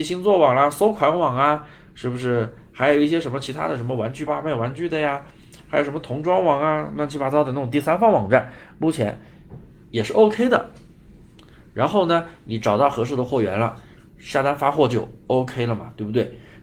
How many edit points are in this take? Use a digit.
1